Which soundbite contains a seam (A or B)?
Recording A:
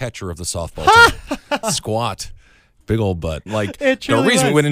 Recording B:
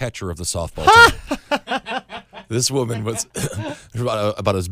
A